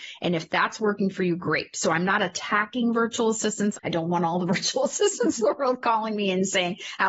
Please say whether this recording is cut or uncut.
uncut